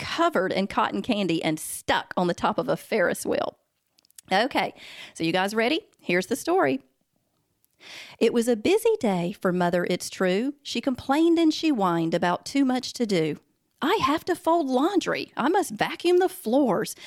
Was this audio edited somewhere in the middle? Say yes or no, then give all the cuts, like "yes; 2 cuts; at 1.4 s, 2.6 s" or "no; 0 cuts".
no; 0 cuts